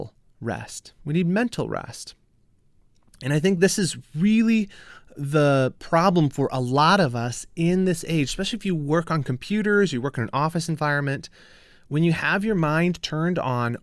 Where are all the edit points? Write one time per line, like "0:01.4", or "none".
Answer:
none